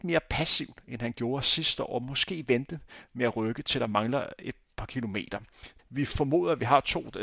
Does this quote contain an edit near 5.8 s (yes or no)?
yes